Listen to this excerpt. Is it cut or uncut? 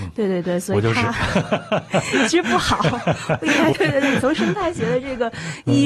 cut